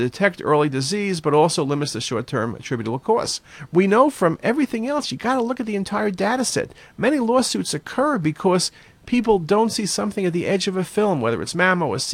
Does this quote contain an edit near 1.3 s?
no; 1 cut; at 3.7 s

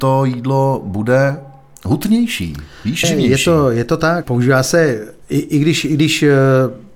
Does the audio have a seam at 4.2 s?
yes; 2 cuts; at 3.0 s, 4.2 s

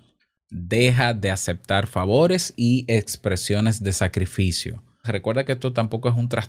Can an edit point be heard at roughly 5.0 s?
yes; 1 cut; at 5.0 s

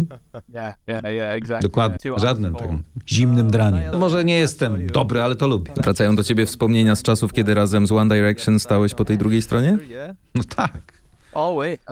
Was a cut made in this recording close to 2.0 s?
yes; 3 cuts; at 2.0 s, 3.9 s, 5.8 s

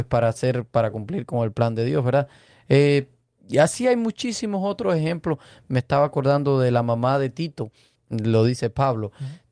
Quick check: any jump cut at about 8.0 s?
yes; 1 cut; at 8.0 s

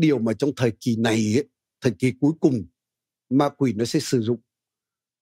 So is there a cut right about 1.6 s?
no; 0 cuts

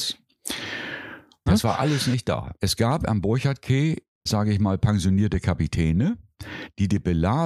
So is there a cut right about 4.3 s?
yes; 2 cuts; at 1.5 s, 4.3 s

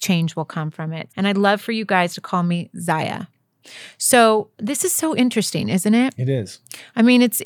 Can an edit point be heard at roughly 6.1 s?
no; 2 cuts; at 1.1 s, 4.5 s

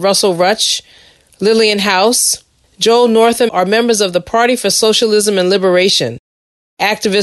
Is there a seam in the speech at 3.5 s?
yes; 1 cut; at 3.5 s

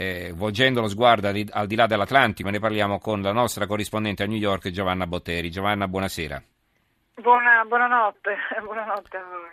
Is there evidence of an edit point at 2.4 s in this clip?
yes; 1 cut; at 2.4 s

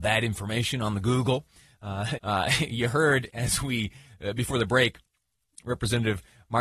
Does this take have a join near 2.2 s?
yes; 1 cut; at 2.2 s

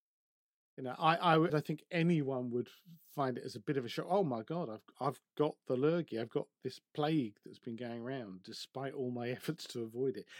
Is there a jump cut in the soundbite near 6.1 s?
no; 1 cut; at 1.5 s

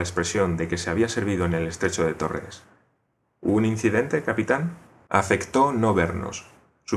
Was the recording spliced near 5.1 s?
yes; 1 cut; at 5.1 s

